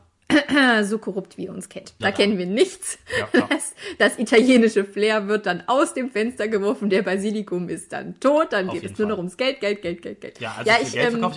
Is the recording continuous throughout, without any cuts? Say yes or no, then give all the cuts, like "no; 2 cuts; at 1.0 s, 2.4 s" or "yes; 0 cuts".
no; 1 cut; at 2.0 s